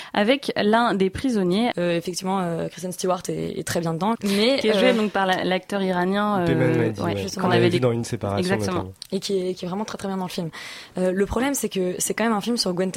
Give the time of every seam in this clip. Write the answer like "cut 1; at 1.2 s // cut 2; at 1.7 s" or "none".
cut 1; at 1.7 s // cut 2; at 4.1 s